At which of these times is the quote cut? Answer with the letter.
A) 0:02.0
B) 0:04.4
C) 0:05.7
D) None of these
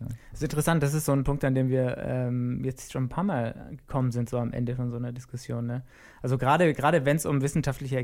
D